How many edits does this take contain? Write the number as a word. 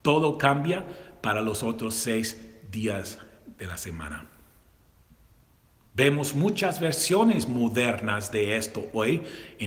one